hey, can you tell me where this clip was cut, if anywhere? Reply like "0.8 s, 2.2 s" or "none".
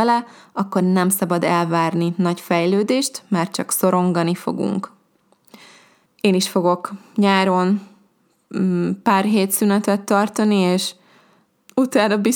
6.1 s